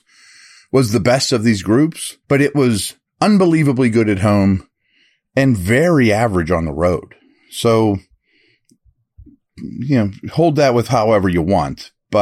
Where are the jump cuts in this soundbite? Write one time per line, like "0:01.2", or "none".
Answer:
0:02.2